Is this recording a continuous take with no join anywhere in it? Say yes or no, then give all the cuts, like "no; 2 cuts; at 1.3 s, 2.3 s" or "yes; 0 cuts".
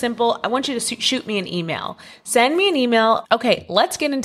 no; 1 cut; at 3.2 s